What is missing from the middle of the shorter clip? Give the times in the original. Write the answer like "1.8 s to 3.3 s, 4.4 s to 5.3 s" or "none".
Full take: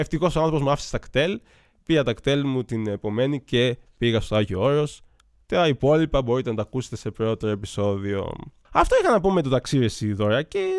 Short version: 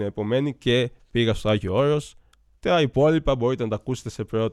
none